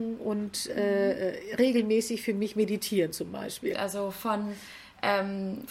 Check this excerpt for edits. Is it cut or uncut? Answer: cut